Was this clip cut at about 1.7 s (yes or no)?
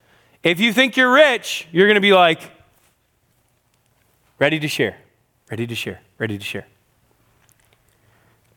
no